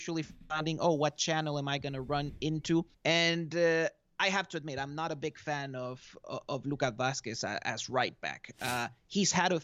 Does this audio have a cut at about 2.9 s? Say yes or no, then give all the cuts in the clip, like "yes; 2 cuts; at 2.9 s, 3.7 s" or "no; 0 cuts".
yes; 1 cut; at 2.9 s